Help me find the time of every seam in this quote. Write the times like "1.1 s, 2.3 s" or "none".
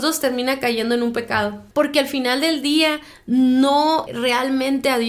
1.7 s, 4.1 s